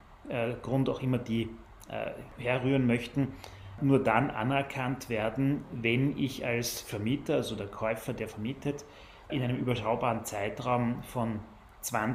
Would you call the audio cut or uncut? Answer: uncut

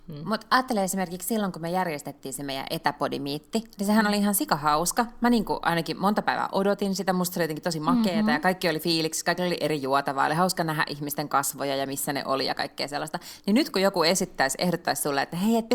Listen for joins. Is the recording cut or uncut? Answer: uncut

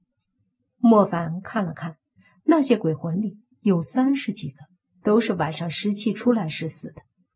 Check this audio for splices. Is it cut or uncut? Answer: uncut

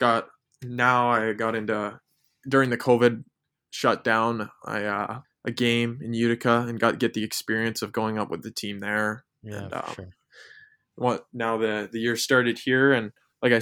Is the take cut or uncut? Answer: cut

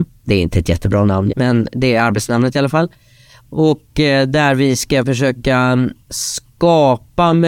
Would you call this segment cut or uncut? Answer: cut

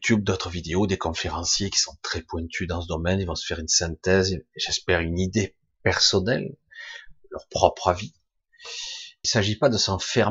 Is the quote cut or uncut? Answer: cut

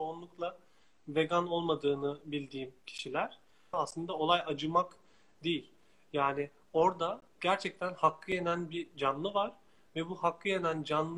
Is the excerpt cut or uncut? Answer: cut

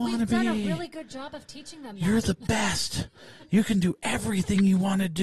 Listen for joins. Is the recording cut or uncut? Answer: uncut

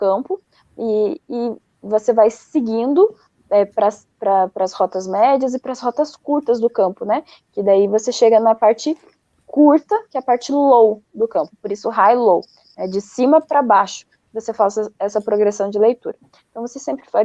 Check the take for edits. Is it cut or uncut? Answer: uncut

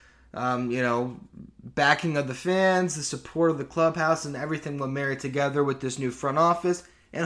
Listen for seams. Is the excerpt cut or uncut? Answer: uncut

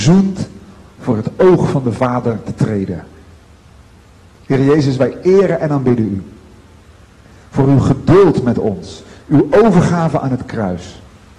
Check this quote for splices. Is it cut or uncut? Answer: cut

